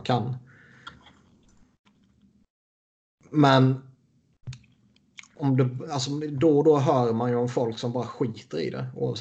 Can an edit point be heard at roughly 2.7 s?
no; 0 cuts

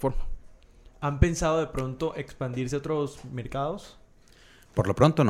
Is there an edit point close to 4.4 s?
no; 0 cuts

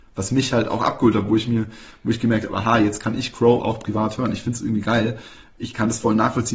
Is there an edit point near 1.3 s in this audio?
no; 0 cuts

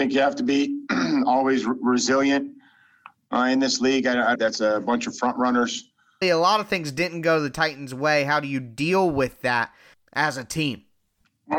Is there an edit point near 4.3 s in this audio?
yes; 2 cuts; at 4.3 s, 6.2 s

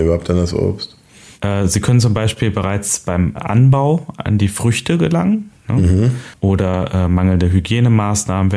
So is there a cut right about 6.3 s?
yes; 1 cut; at 6.3 s

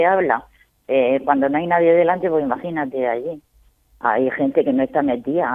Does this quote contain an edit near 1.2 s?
no; 1 cut; at 3.9 s

